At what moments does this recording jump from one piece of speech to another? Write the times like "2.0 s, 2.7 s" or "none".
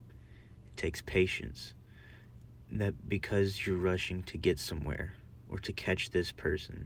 none